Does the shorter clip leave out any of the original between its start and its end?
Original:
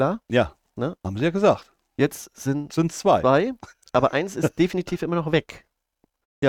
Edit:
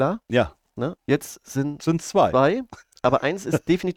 yes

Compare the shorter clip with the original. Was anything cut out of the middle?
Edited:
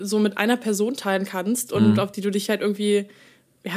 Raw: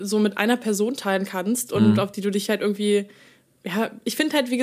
no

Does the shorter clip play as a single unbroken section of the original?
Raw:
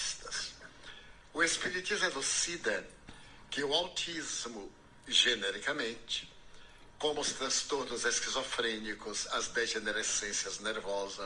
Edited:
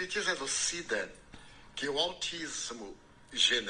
yes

